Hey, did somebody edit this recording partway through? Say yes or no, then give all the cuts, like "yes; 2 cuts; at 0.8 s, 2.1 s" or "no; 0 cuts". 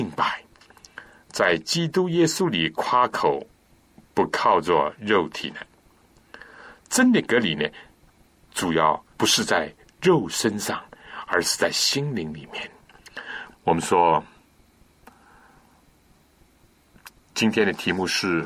yes; 2 cuts; at 9.1 s, 13.5 s